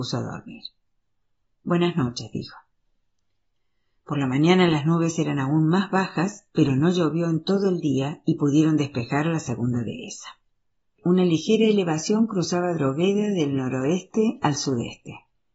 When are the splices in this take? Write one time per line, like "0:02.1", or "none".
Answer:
none

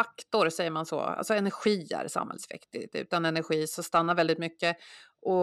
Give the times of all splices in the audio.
none

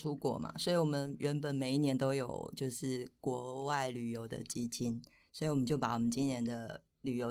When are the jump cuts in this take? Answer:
none

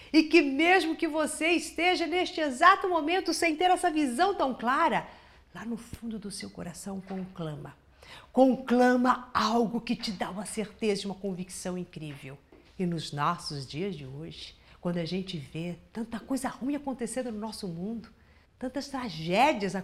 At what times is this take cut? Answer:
0:12.7
0:18.4

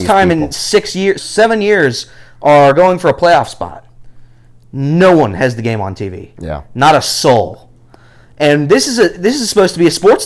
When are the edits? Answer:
0:01.2

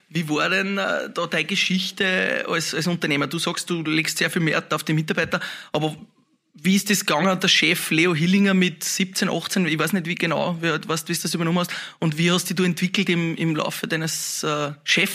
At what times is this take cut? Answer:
none

